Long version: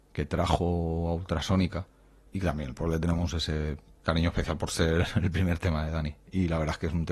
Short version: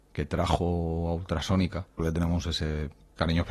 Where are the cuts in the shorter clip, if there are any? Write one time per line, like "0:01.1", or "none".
0:02.0